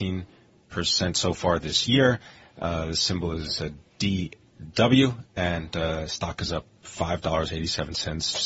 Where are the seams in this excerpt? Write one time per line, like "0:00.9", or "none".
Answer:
none

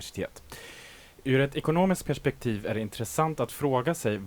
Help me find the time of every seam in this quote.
none

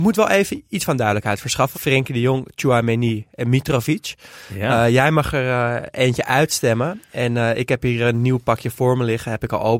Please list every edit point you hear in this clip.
0:01.7

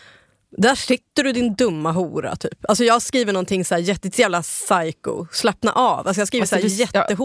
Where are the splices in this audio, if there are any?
none

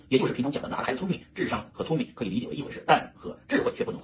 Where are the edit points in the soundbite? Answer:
none

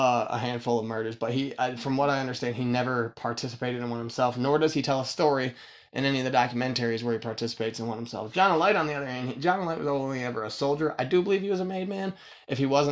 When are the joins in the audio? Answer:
none

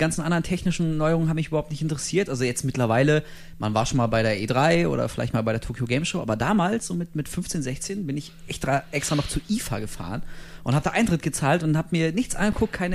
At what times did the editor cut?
none

